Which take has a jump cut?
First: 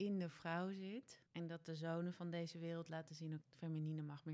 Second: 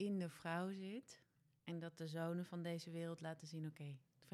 first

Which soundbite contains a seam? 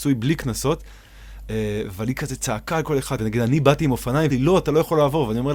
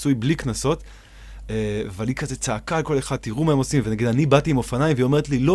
first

